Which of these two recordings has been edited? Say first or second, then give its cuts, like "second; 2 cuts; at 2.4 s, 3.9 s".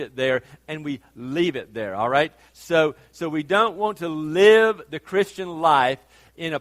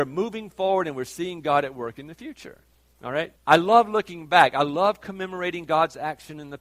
second; 1 cut; at 3.4 s